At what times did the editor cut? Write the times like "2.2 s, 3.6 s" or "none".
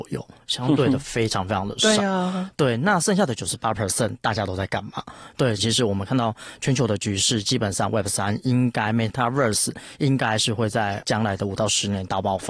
5.6 s

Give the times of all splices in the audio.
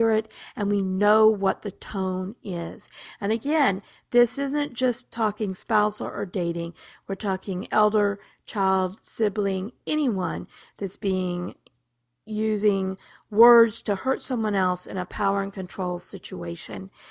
none

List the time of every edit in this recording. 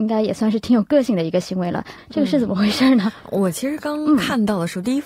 2.0 s

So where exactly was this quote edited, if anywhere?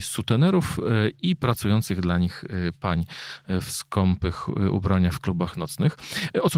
none

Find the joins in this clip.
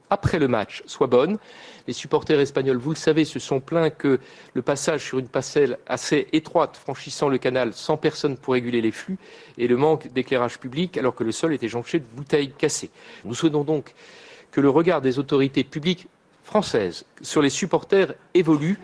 13.2 s

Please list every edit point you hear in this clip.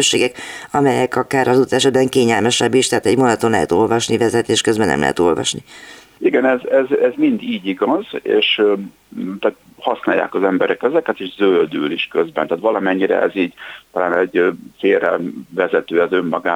none

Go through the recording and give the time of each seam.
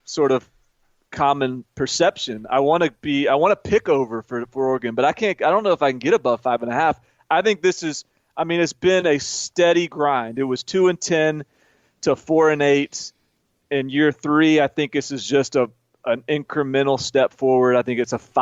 none

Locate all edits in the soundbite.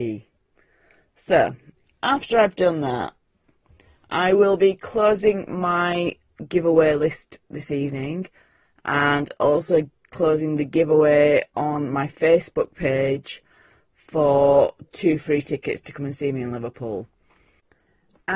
none

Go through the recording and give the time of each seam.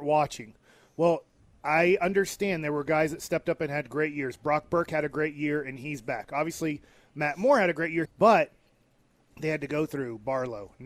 8.0 s

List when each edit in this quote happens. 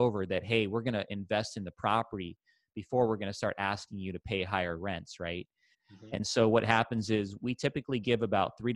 5.7 s, 7.4 s

